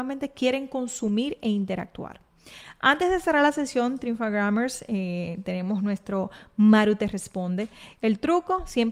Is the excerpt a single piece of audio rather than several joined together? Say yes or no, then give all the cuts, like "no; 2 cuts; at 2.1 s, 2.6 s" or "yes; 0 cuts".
no; 1 cut; at 7.9 s